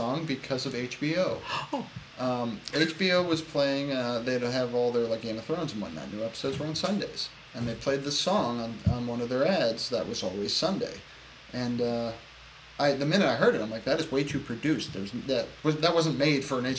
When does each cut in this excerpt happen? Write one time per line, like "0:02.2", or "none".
none